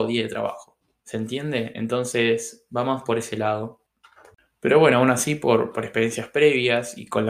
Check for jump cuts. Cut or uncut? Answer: uncut